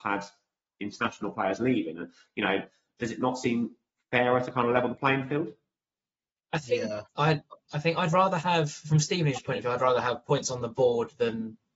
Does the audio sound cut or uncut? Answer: uncut